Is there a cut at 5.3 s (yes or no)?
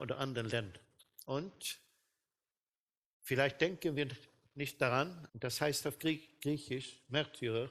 yes